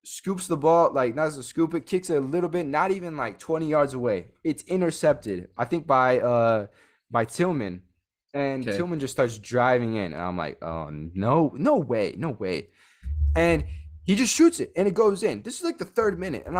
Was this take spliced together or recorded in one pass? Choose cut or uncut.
uncut